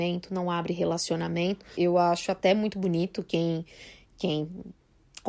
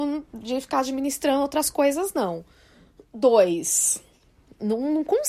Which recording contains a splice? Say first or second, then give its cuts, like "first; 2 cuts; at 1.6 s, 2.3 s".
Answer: first; 1 cut; at 1.7 s